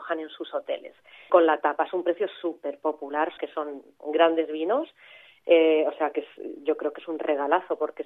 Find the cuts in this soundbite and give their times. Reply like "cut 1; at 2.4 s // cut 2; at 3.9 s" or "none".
cut 1; at 1.3 s // cut 2; at 3.4 s